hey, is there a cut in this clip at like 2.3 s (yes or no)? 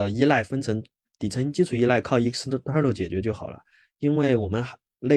no